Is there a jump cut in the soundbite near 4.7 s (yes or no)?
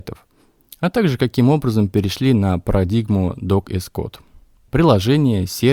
yes